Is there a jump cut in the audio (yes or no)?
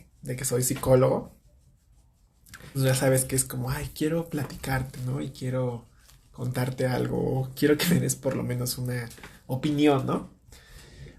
yes